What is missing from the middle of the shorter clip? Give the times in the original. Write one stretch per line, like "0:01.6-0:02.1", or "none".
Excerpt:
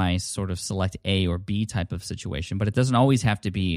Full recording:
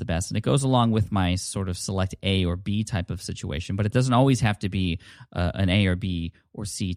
none